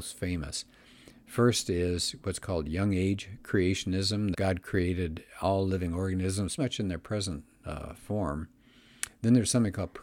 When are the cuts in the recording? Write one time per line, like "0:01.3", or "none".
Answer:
0:04.3
0:06.6